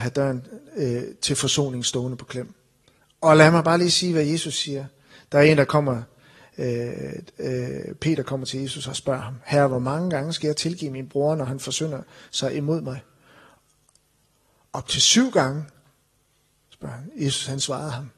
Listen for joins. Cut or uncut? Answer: uncut